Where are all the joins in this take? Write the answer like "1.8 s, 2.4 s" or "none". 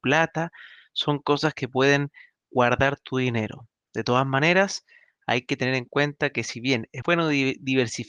7.0 s